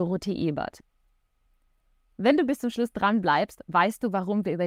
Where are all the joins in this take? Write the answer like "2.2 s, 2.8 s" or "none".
none